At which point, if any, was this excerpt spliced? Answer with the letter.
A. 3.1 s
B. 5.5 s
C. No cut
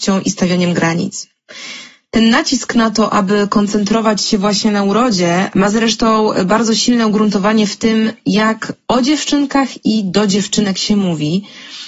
B